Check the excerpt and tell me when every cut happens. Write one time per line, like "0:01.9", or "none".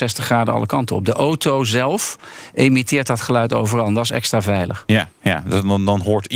none